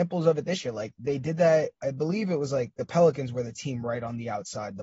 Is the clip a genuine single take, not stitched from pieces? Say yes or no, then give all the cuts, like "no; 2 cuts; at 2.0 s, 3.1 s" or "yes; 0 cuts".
yes; 0 cuts